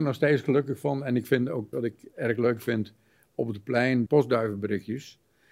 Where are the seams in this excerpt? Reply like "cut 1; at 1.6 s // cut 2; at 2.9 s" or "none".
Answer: cut 1; at 1.7 s // cut 2; at 4.1 s